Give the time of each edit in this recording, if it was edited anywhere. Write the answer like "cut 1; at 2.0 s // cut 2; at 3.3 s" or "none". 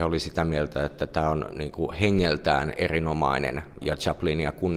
cut 1; at 3.8 s